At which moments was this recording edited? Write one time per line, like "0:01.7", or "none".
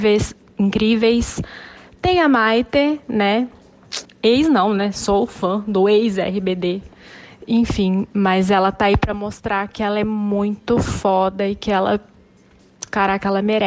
0:04.1